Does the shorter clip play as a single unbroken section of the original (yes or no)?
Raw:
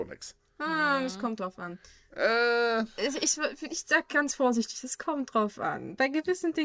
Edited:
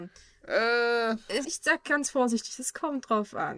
no